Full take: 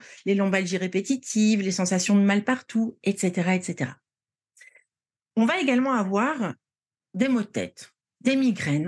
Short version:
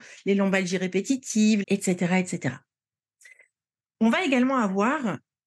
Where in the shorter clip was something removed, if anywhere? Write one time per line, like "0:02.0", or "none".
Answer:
0:01.6